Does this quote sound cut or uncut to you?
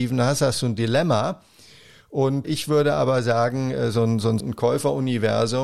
cut